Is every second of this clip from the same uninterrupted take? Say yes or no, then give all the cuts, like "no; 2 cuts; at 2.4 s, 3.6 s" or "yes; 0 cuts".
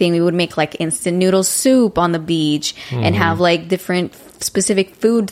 yes; 0 cuts